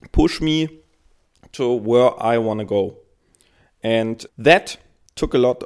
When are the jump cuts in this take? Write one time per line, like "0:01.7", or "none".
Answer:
0:04.3